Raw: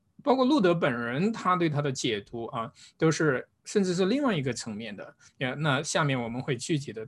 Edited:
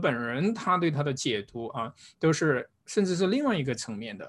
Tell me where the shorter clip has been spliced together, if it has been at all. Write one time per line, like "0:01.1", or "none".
none